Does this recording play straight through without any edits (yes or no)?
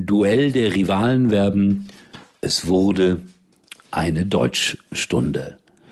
yes